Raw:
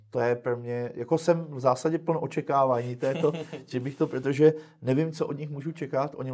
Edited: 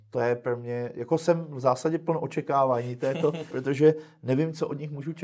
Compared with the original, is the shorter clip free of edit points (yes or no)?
no